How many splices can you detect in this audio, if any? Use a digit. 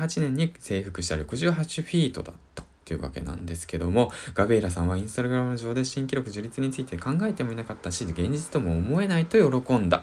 0